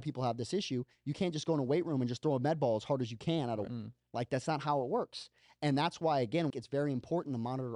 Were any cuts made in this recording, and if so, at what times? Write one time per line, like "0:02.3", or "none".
0:03.7
0:06.5